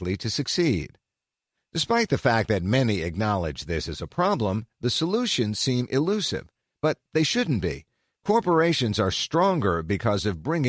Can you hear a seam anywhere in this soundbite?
no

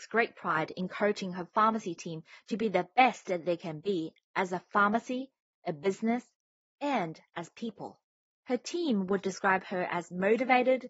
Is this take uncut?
yes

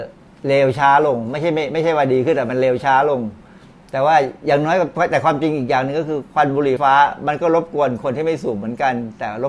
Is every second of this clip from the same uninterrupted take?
no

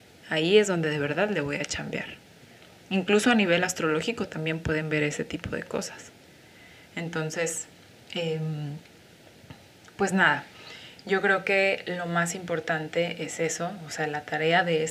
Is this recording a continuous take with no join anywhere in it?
yes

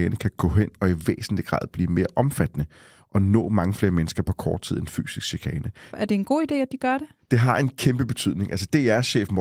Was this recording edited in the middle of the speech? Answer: yes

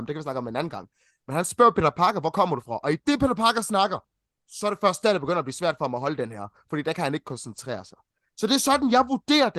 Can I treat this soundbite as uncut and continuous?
yes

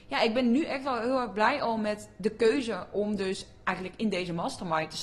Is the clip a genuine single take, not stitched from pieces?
yes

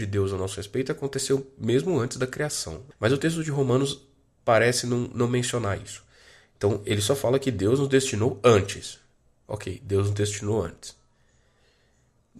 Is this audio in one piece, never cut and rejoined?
no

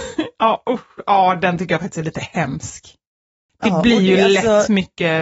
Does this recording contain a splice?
no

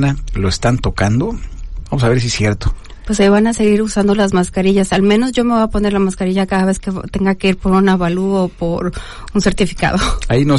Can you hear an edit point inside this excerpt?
no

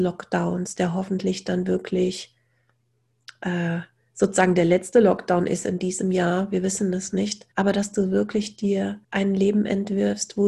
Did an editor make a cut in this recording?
yes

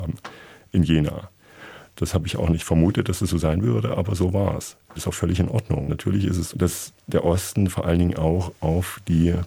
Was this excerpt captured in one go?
no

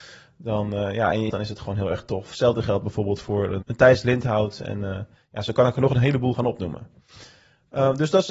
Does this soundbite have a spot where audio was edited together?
yes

